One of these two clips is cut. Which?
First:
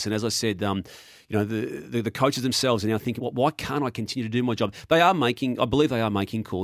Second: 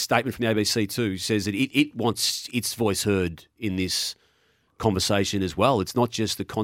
first; 1 cut; at 3.2 s

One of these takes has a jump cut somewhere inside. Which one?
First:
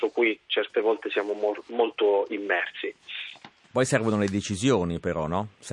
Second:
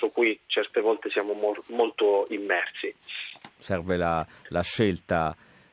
second; 1 cut; at 3.5 s

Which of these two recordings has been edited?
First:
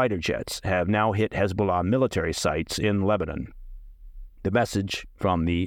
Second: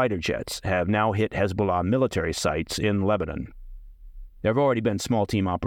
second; 1 cut; at 4.4 s

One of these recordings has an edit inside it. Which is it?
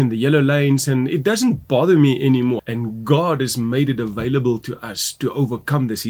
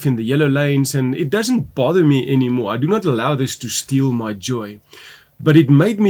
first; 1 cut; at 2.6 s

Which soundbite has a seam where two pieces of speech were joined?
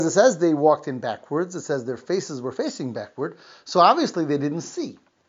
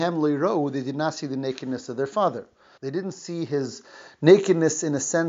second; 1 cut; at 2.8 s

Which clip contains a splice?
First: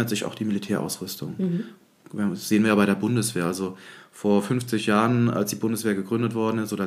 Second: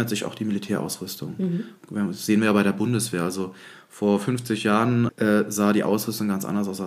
second; 2 cuts; at 1.8 s, 5.1 s

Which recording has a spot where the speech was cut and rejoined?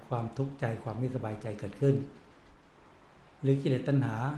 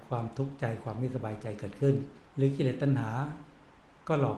second; 1 cut; at 2.3 s

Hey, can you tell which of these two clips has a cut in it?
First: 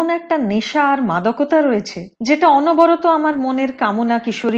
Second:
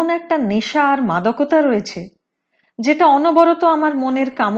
first; 1 cut; at 2.2 s

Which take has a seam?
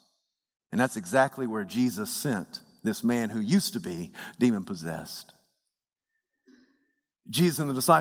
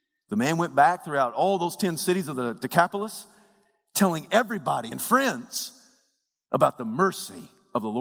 second; 1 cut; at 4.9 s

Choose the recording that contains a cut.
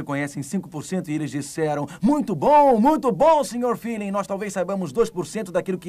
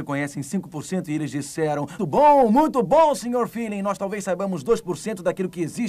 second; 1 cut; at 2.0 s

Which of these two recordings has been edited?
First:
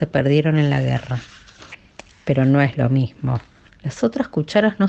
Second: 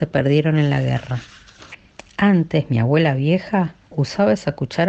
first; 2 cuts; at 2.1 s, 3.7 s

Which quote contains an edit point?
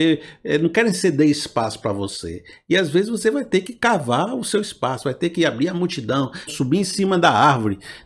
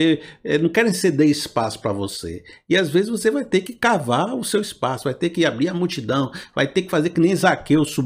first; 1 cut; at 6.5 s

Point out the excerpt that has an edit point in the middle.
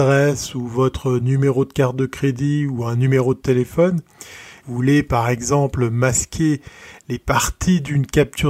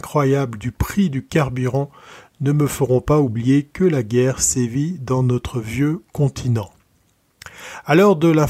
first; 1 cut; at 4.6 s

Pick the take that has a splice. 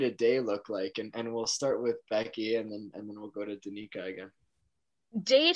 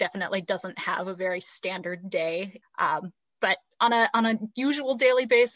second; 1 cut; at 2.6 s

